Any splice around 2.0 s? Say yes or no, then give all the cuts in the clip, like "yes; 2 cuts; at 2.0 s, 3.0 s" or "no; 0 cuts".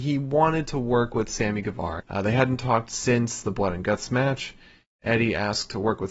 yes; 1 cut; at 2.0 s